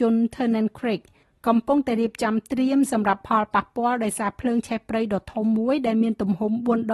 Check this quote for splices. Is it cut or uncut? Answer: uncut